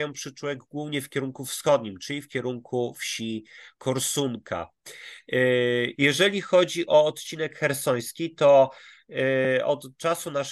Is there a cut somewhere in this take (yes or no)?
yes